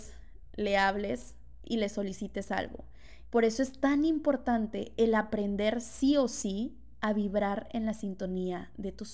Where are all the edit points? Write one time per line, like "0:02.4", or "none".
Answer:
0:03.2